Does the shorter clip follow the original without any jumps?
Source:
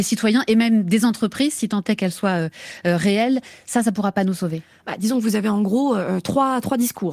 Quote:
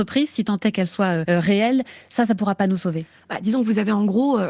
no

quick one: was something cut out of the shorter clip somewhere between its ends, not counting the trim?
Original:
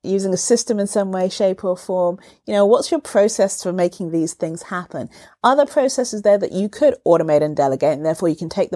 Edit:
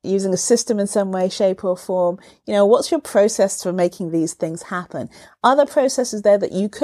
no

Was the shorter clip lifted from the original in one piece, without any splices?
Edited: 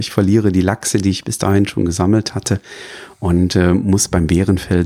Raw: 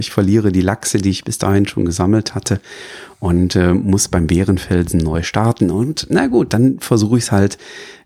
yes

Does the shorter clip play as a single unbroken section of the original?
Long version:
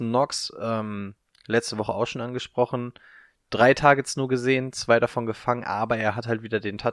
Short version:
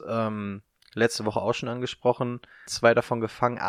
no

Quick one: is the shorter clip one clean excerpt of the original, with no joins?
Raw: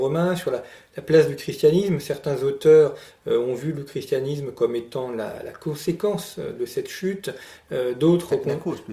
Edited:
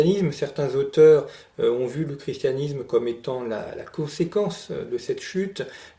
yes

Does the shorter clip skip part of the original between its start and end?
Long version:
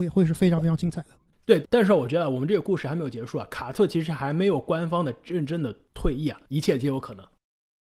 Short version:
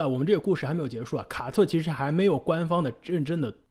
no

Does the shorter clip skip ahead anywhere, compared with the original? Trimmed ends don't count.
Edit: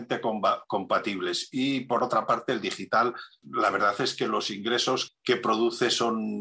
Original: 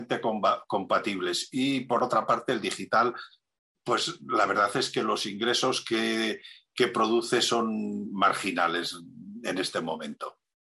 yes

